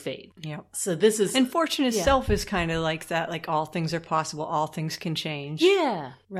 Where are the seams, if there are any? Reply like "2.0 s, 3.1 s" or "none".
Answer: none